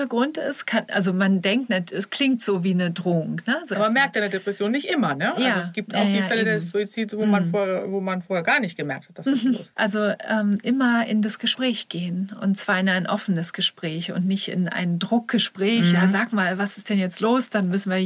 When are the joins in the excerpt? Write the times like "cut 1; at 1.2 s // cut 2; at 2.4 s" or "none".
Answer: cut 1; at 9.7 s